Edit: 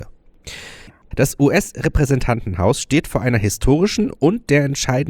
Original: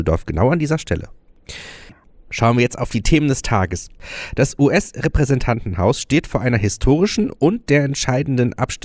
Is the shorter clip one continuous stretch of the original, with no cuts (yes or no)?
no